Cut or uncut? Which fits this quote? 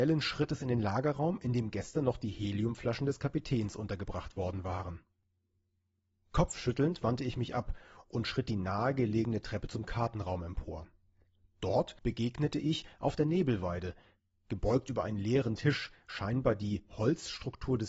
uncut